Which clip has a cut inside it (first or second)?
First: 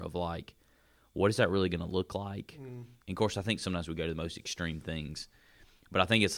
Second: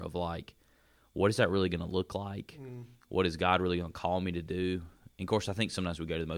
first